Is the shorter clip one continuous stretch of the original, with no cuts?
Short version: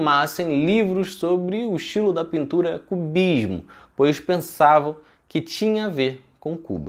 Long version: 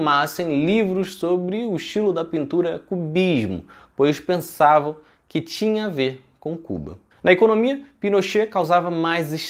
yes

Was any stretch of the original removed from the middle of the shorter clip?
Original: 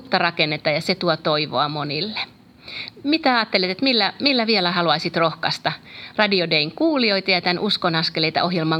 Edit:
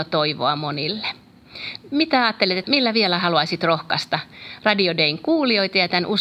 yes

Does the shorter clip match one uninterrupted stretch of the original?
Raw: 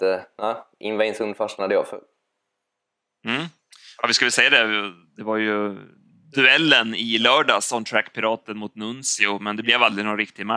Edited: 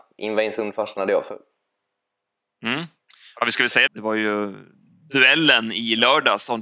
no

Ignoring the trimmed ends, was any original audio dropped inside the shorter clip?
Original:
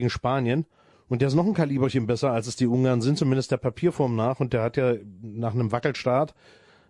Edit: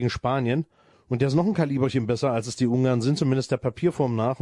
no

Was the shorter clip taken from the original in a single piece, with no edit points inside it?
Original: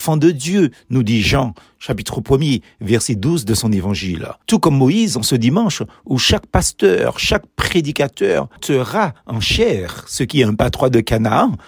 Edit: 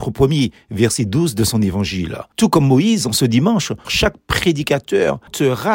no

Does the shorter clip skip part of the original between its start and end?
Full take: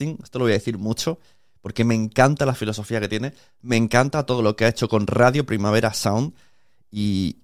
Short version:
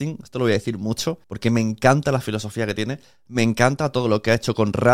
yes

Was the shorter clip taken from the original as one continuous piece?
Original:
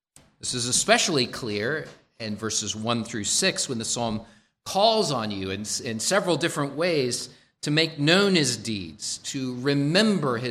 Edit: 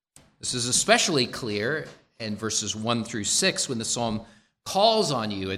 yes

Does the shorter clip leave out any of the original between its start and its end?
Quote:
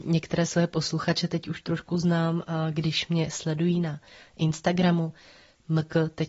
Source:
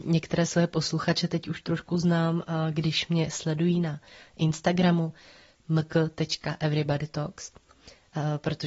no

